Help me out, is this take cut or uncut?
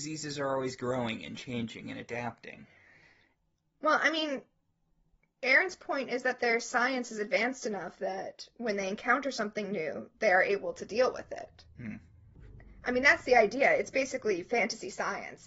uncut